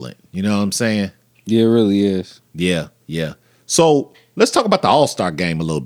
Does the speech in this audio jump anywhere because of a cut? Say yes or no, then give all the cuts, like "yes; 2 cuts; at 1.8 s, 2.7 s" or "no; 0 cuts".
no; 0 cuts